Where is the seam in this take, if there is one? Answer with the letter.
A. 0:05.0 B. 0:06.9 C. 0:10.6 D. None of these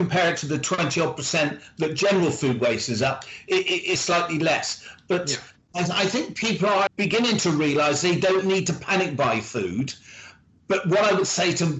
B